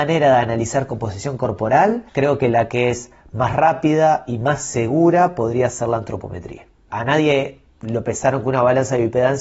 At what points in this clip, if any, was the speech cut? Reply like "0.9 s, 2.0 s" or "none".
2.1 s, 6.9 s